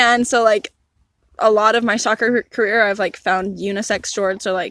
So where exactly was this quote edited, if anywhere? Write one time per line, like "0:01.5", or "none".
none